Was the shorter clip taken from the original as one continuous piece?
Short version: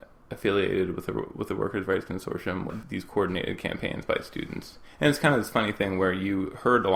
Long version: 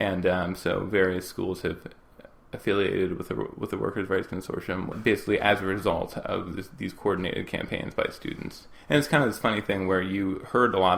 no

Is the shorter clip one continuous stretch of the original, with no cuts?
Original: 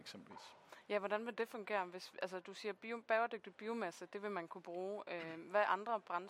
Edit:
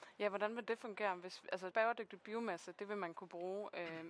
no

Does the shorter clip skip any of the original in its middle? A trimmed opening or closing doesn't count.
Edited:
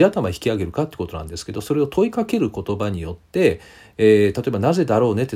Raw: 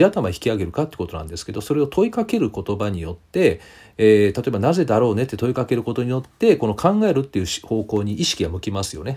no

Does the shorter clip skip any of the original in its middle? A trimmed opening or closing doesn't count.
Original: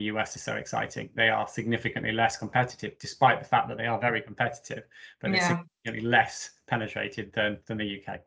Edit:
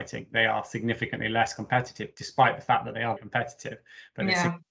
yes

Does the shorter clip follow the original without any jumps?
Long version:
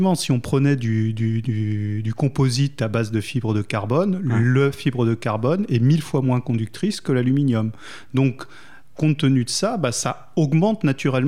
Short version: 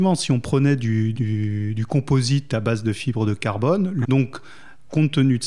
no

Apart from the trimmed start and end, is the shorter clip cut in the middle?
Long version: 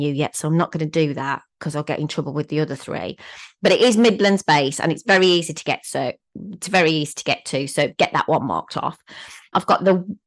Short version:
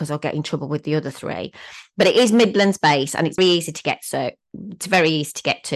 yes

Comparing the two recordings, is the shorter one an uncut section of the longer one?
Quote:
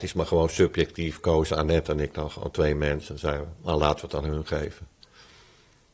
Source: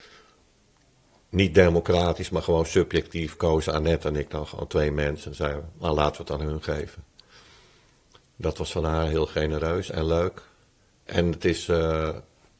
yes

